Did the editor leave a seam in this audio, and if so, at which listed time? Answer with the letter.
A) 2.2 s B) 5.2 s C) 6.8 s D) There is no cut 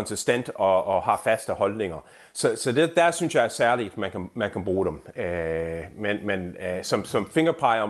D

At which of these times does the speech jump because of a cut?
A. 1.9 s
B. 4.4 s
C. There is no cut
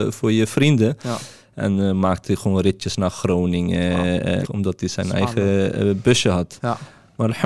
B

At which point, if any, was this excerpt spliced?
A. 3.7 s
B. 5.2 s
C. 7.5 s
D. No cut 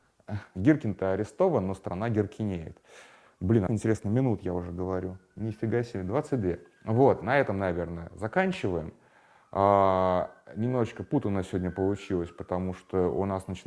A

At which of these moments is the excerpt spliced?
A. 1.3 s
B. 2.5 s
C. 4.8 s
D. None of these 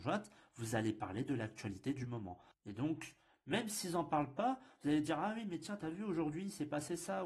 B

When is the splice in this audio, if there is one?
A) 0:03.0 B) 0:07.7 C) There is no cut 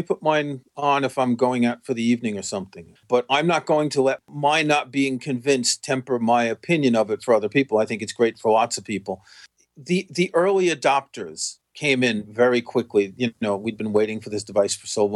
A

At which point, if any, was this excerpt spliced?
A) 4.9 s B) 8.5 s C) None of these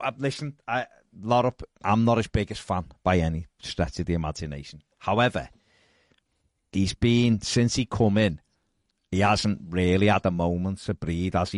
C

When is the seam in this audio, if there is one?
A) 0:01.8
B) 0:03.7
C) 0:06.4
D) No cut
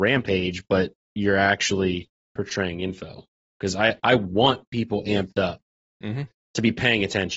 D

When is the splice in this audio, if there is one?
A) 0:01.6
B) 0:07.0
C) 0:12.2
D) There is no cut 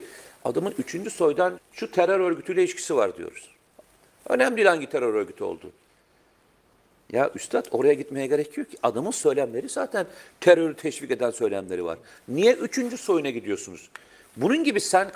A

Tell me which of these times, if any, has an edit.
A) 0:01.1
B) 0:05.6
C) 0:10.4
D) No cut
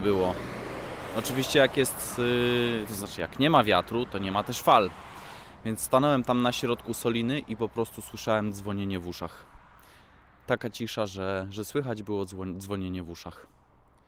D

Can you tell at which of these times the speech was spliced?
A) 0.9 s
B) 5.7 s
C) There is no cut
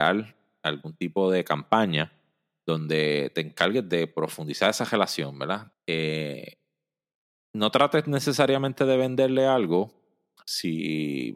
B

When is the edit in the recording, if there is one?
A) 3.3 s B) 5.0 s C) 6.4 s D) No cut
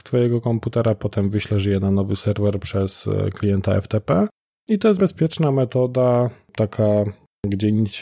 B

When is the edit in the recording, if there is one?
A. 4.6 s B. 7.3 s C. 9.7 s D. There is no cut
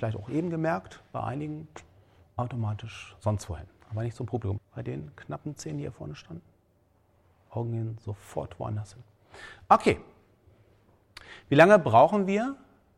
A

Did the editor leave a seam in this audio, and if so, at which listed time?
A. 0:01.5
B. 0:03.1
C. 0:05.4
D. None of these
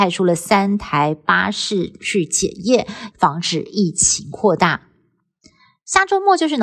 B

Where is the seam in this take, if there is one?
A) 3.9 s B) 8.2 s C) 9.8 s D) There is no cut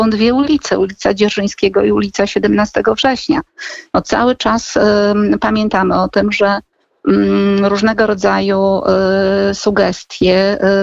A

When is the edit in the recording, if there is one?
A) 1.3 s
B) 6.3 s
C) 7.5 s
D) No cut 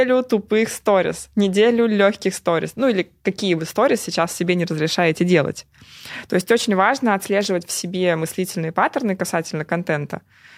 D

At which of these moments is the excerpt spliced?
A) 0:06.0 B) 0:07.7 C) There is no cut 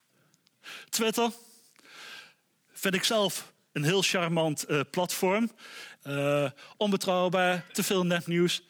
A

